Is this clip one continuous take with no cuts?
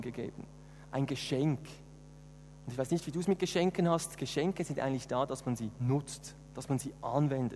yes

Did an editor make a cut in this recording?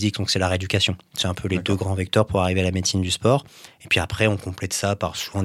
no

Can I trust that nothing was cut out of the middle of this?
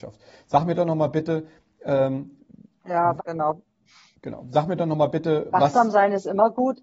no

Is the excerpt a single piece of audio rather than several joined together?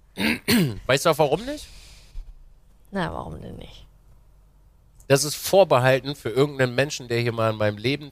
yes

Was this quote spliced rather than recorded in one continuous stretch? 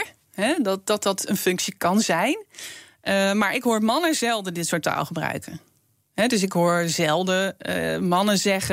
no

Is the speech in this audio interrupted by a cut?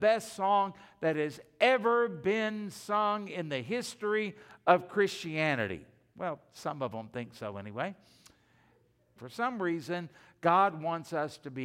yes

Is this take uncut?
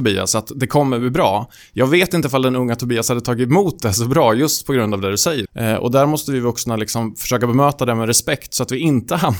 no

